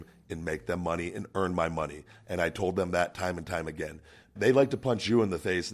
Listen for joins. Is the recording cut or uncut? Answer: cut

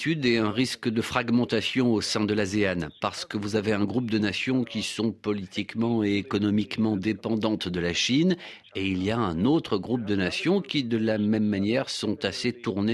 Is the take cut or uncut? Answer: uncut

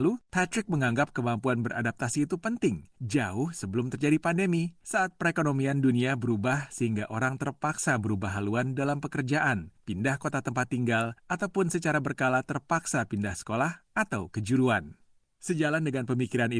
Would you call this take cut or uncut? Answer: uncut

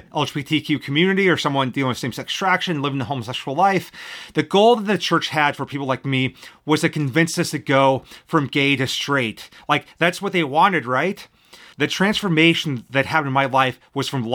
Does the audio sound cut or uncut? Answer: cut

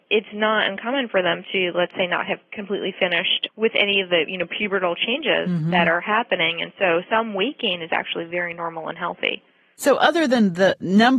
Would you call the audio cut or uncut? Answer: uncut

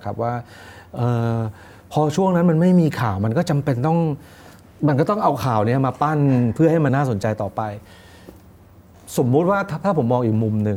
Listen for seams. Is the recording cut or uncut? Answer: cut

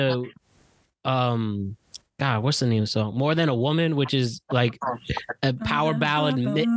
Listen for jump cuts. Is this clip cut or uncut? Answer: uncut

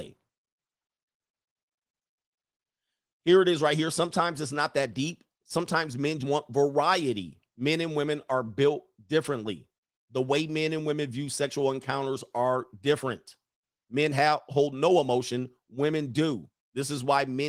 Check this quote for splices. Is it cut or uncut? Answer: cut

